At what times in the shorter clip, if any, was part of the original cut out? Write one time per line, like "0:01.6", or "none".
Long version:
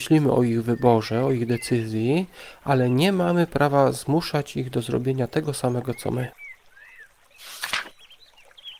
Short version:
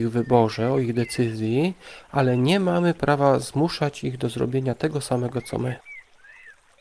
none